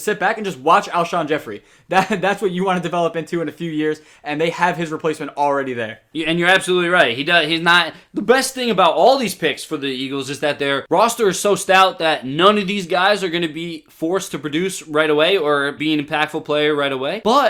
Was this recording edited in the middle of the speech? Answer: yes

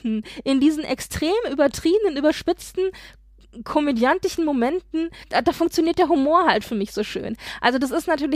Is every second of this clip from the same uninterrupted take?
yes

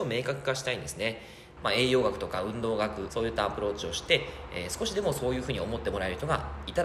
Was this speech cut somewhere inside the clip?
yes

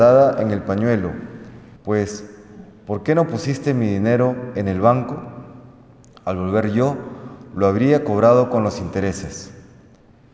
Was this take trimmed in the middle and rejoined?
yes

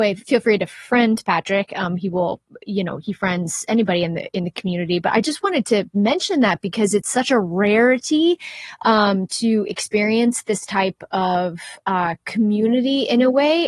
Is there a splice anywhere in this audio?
no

